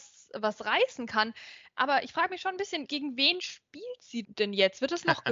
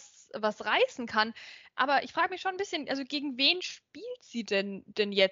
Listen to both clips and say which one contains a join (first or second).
first